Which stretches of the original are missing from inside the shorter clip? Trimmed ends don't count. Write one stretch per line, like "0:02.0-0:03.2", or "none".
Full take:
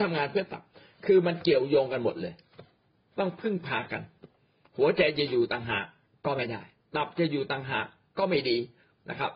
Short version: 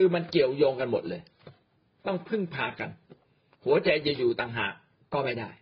none